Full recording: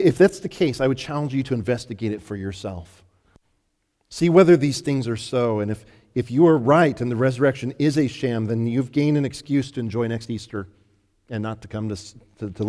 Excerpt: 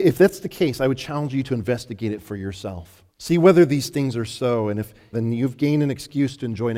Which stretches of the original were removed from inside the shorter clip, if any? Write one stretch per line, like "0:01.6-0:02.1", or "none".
0:03.1-0:04.0
0:06.0-0:08.5